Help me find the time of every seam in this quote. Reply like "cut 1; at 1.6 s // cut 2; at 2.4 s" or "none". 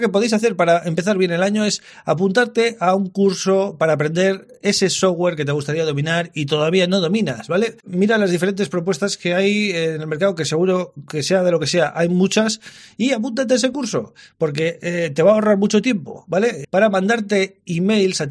cut 1; at 7.8 s // cut 2; at 16.6 s

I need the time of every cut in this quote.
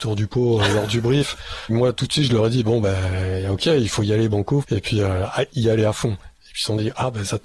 cut 1; at 1.7 s // cut 2; at 4.6 s

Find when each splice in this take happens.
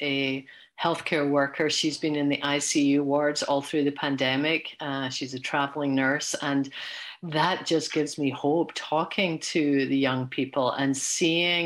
none

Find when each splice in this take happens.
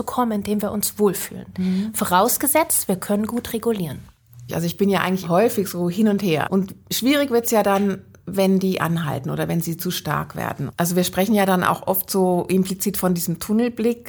cut 1; at 4.5 s // cut 2; at 6.4 s

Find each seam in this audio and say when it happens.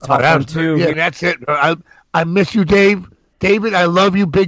cut 1; at 0.9 s

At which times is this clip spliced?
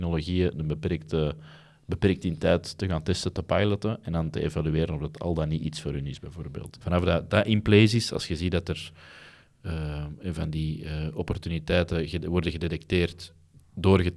cut 1; at 6.7 s

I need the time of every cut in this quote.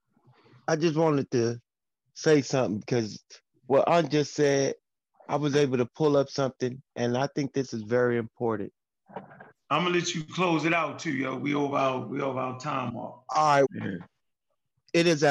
cut 1; at 9.5 s // cut 2; at 13.6 s

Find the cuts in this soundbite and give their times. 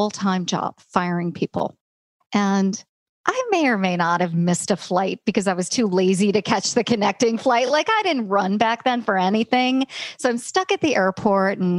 none

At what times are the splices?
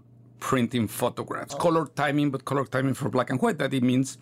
cut 1; at 1.5 s

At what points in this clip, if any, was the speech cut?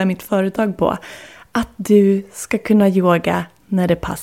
none

